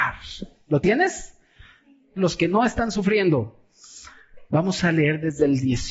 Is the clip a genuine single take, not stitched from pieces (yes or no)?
no